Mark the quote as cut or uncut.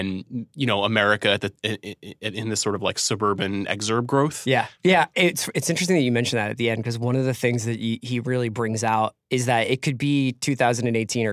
cut